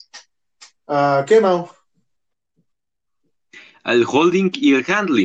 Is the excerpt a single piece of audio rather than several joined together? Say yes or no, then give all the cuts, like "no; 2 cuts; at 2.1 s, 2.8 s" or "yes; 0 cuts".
yes; 0 cuts